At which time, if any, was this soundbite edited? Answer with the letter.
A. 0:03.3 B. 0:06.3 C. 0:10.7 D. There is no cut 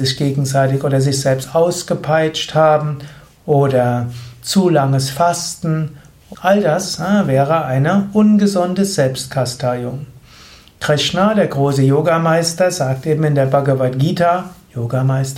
B